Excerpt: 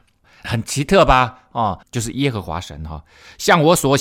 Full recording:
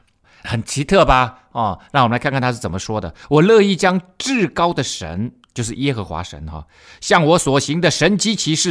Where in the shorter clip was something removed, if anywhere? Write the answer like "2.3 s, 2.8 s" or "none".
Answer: 1.8 s

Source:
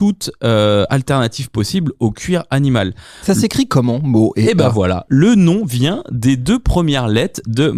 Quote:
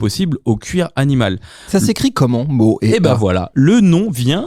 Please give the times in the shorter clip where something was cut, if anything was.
none

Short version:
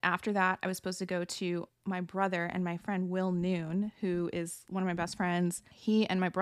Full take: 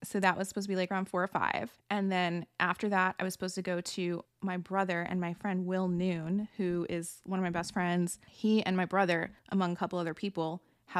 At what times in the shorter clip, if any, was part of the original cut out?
none

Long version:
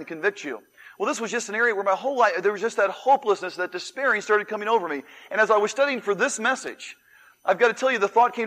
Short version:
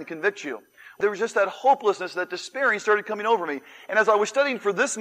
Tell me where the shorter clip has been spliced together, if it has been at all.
1.0 s

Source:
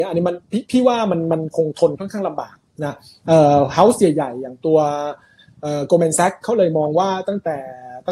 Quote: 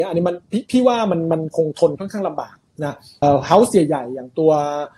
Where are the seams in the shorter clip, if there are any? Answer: 3.2 s

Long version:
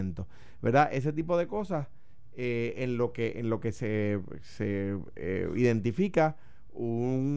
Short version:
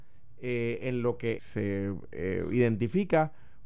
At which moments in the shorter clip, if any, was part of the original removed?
1.4 s

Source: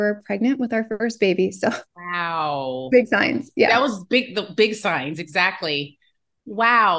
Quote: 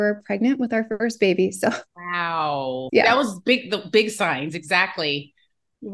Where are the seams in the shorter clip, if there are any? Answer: 2.9 s

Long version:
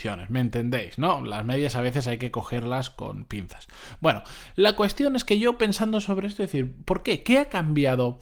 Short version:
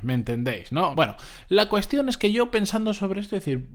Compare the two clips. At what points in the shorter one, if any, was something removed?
0.9 s

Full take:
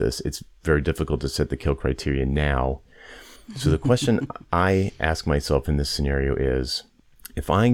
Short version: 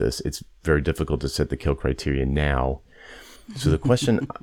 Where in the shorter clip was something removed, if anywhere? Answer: none

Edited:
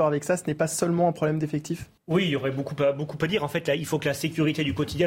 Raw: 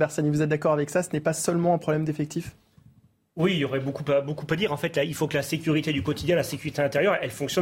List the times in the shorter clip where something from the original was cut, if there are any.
2.0 s

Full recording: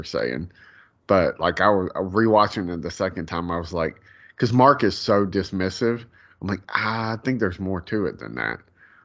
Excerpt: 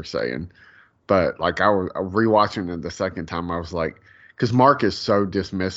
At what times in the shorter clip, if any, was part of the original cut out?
none

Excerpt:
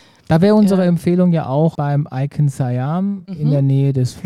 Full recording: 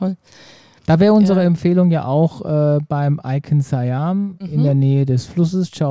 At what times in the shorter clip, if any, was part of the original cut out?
1.8 s

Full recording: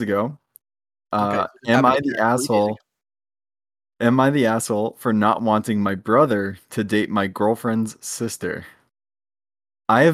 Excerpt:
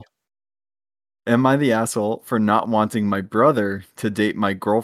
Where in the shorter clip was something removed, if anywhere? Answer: none

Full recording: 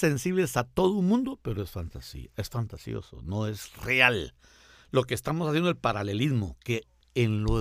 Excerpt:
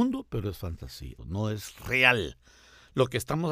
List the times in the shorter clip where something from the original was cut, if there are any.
1.2 s

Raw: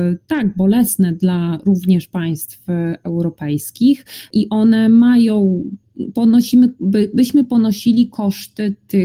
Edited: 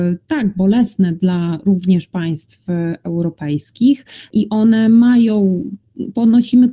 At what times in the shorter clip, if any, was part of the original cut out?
none

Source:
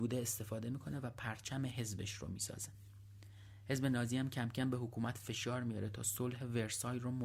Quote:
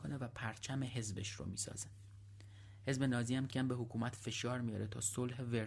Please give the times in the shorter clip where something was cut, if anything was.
3.5 s

